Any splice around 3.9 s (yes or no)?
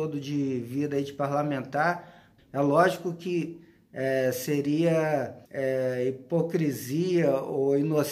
no